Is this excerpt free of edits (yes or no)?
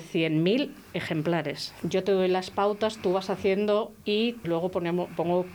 no